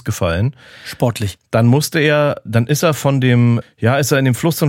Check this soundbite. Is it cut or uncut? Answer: cut